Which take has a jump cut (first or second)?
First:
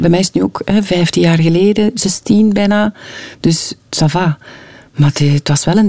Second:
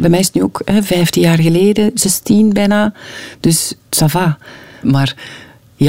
second